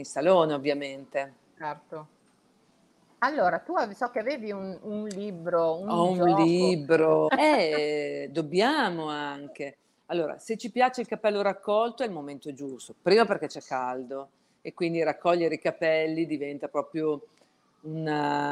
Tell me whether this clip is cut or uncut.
cut